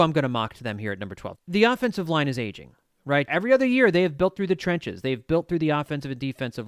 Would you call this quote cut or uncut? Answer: cut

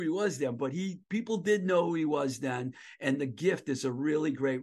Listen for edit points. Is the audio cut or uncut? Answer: uncut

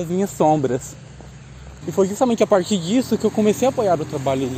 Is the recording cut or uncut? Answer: cut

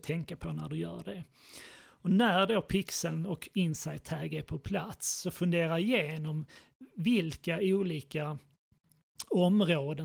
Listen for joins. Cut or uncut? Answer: uncut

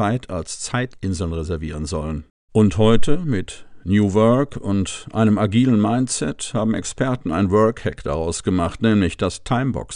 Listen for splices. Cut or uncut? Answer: cut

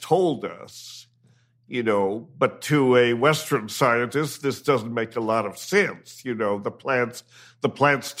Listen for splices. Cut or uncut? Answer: uncut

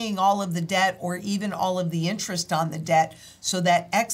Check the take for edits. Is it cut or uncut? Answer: uncut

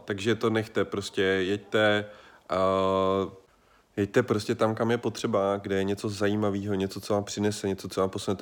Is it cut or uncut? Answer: uncut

